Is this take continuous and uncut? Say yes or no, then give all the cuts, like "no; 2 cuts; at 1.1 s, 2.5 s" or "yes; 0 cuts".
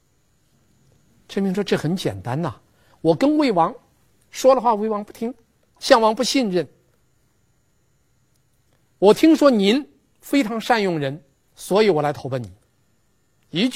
no; 1 cut; at 5.8 s